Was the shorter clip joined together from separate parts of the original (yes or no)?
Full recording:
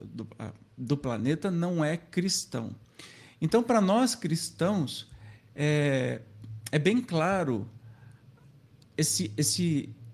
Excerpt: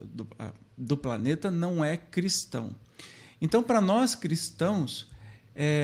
no